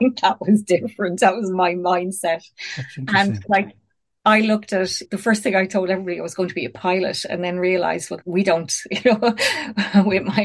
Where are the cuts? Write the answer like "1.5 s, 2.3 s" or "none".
5.0 s, 8.2 s